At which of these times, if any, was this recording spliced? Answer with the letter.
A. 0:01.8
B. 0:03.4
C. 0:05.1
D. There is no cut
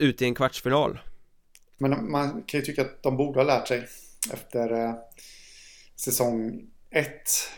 A